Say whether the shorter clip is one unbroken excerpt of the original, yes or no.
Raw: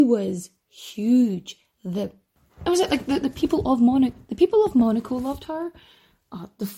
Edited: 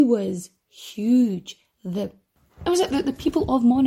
no